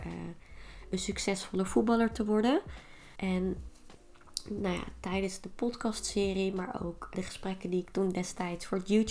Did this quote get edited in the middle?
yes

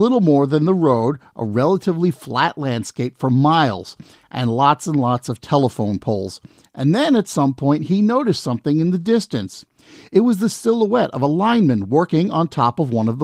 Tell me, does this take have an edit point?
no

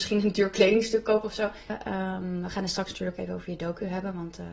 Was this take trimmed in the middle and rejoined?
yes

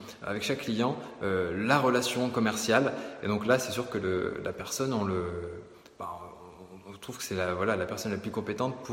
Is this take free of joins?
yes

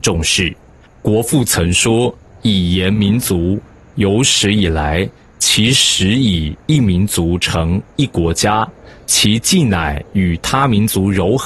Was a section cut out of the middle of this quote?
no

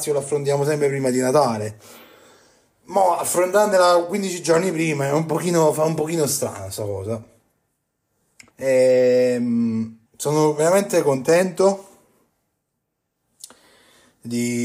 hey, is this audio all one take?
no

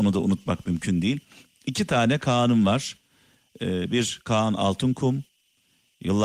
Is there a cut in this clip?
no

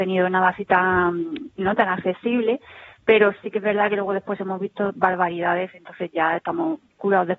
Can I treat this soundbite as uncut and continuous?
no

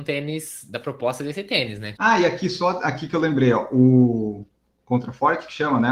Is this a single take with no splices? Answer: no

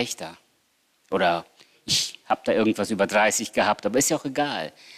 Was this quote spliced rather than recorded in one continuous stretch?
no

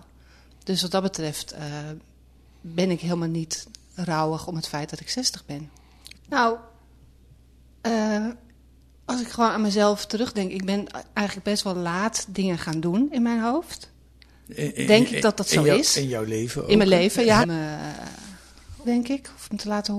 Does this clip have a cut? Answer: yes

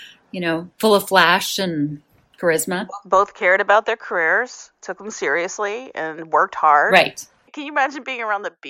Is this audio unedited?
no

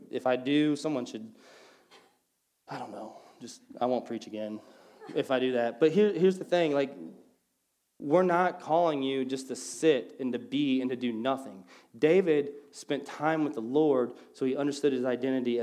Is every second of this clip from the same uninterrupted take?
yes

